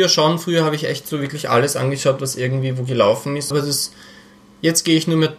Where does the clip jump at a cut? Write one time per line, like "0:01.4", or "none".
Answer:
0:03.5